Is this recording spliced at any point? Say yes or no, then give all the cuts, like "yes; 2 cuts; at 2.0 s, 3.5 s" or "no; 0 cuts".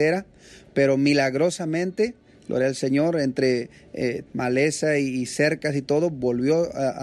yes; 1 cut; at 4.3 s